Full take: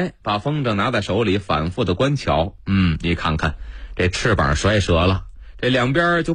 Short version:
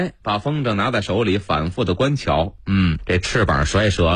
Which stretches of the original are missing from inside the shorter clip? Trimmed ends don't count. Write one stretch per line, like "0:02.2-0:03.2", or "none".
0:03.0-0:03.9